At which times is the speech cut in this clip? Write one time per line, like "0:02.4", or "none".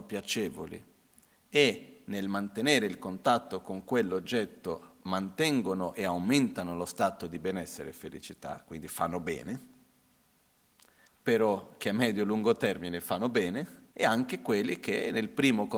0:11.0
0:13.9